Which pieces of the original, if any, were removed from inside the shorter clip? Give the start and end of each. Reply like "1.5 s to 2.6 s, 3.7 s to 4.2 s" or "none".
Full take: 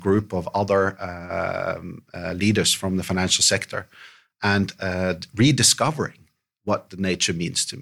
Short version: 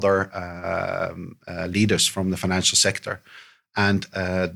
none